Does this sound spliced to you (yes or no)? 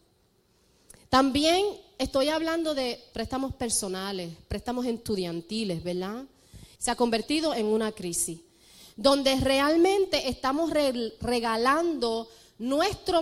yes